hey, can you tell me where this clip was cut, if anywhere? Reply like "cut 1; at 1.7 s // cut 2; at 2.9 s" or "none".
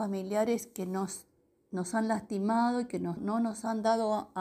cut 1; at 3.2 s